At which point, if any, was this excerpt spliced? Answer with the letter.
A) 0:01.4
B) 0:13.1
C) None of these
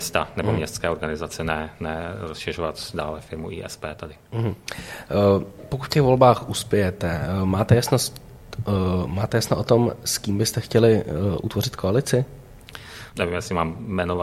B